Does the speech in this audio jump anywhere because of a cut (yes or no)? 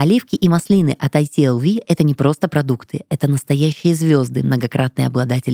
no